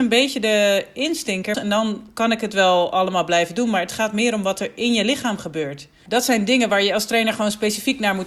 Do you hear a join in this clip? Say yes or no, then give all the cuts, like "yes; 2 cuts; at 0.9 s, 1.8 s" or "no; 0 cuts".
yes; 2 cuts; at 1.5 s, 6.1 s